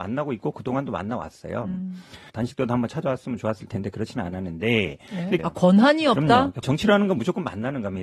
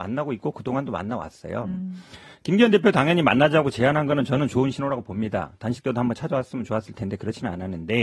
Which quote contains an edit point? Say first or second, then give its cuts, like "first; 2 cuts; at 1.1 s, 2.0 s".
first; 3 cuts; at 2.3 s, 5.4 s, 6.6 s